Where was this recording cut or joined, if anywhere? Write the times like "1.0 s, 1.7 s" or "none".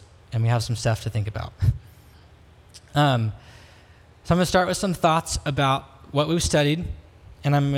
none